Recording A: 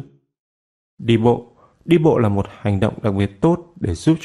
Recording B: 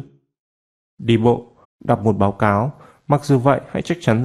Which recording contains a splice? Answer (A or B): B